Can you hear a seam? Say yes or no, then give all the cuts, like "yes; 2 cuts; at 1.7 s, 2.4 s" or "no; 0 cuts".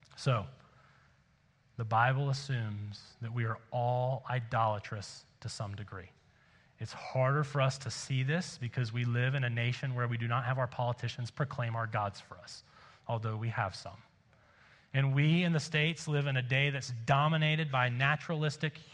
no; 0 cuts